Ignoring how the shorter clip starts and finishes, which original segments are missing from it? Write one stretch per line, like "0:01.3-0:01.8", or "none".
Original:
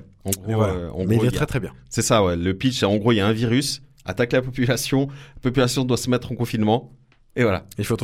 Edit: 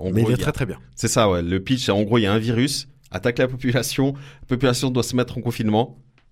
none